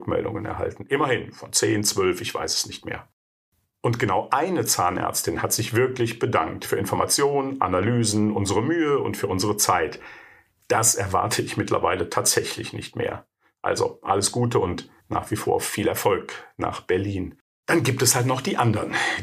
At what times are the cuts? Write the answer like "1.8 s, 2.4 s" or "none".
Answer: 15.0 s, 17.6 s